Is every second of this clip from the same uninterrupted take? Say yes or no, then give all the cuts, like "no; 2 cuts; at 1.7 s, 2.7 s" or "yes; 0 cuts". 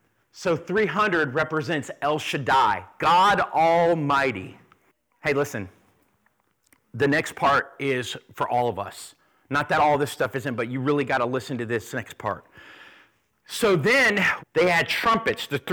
no; 1 cut; at 14.4 s